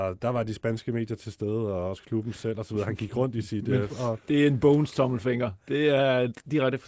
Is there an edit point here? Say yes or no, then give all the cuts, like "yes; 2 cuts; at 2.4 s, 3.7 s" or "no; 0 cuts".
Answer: yes; 1 cut; at 3.9 s